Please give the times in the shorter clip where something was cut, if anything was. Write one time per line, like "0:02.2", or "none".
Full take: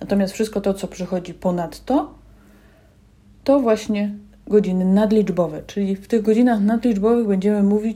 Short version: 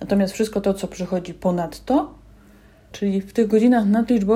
0:02.9